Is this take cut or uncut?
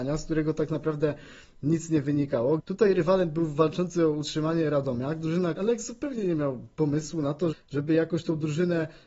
cut